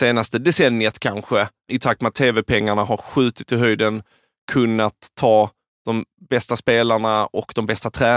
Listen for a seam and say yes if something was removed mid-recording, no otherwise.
yes